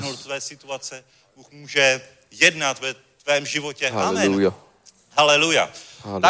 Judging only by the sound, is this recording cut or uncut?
uncut